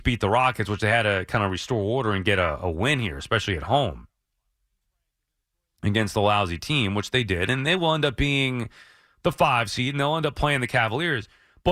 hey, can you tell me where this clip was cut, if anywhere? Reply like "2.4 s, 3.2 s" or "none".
none